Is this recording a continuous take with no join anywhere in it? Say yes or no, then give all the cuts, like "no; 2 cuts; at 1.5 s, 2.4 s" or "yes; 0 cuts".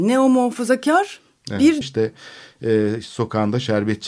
no; 1 cut; at 1.8 s